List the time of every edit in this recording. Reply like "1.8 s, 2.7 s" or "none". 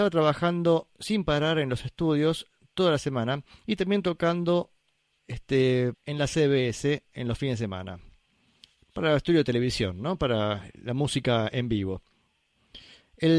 5.9 s